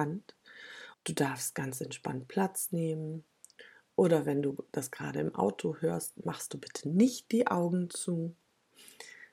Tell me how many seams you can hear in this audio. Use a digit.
1